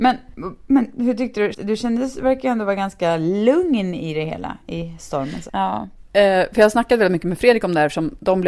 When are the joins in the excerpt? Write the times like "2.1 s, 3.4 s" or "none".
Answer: 1.5 s, 5.5 s